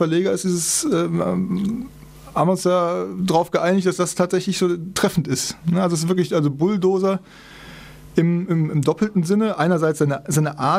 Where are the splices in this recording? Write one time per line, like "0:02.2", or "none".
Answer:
none